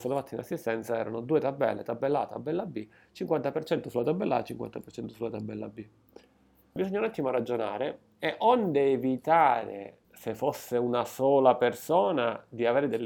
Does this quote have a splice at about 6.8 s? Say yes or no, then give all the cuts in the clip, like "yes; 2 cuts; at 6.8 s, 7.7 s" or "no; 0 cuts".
yes; 2 cuts; at 6.8 s, 10.0 s